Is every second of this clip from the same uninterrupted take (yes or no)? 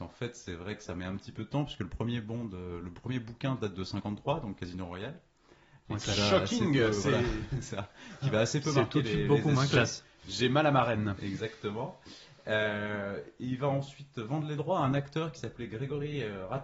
no